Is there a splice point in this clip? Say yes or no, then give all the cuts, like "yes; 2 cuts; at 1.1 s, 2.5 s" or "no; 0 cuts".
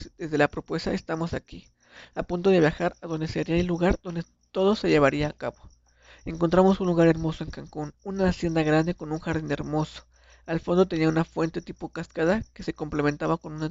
no; 0 cuts